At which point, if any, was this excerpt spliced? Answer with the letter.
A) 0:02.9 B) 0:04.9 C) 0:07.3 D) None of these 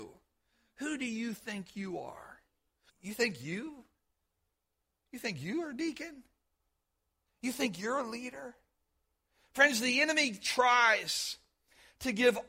A